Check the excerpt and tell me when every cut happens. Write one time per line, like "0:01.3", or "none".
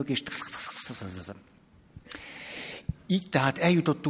none

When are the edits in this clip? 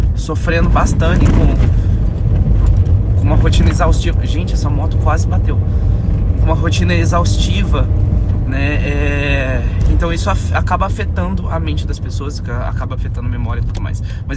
0:01.2

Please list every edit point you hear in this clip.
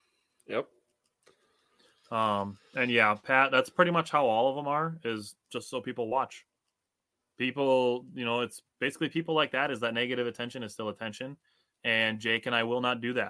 none

